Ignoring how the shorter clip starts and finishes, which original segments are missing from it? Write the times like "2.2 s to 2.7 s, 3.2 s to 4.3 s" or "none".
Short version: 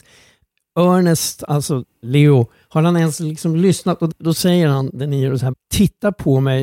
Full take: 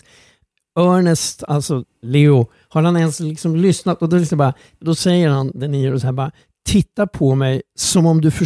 4.1 s to 4.7 s, 6.1 s to 6.5 s